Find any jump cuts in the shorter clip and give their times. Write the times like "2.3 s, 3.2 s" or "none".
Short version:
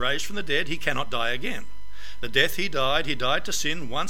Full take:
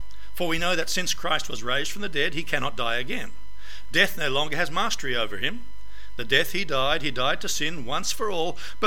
2.2 s